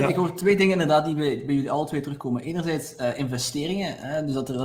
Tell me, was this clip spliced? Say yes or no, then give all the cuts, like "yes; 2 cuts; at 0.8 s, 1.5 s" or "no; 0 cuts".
no; 0 cuts